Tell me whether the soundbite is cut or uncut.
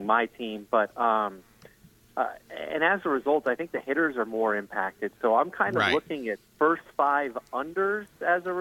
cut